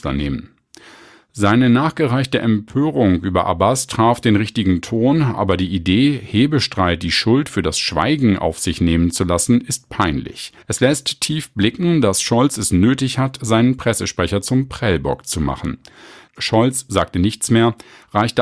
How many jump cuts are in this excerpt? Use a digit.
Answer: 2